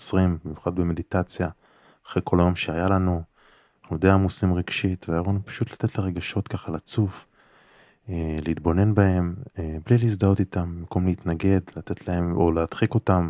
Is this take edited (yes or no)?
no